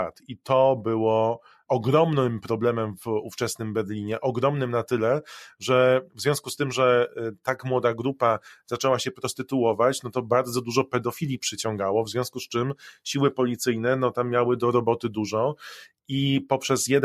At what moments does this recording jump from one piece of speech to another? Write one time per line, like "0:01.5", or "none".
0:01.7